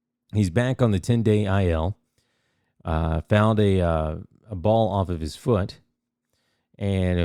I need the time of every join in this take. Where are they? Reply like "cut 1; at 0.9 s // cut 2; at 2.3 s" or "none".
none